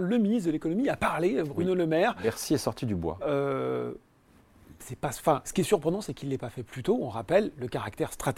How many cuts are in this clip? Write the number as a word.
one